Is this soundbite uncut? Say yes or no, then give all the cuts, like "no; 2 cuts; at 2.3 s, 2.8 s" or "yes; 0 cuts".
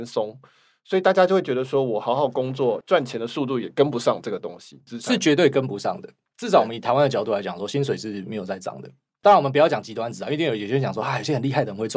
yes; 0 cuts